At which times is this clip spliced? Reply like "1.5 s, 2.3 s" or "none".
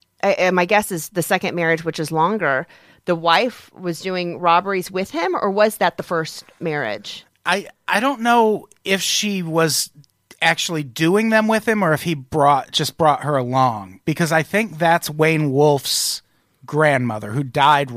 none